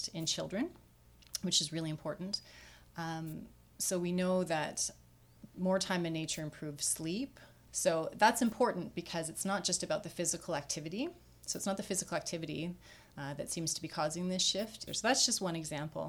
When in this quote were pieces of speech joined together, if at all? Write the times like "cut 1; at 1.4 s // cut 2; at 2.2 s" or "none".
cut 1; at 7.7 s // cut 2; at 14.9 s